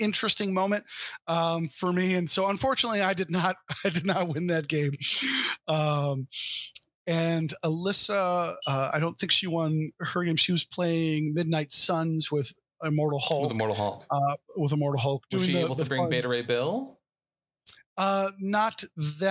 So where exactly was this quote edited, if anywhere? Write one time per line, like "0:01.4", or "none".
none